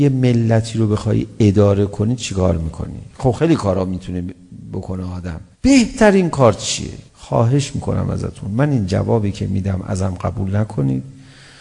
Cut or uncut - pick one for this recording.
cut